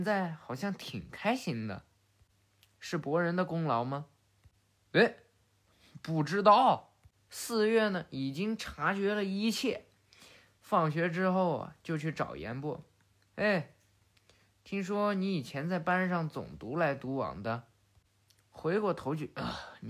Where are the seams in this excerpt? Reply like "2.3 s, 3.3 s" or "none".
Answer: 7.3 s